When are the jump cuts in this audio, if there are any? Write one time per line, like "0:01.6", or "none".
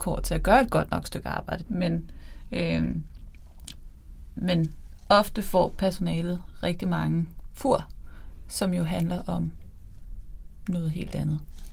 0:01.6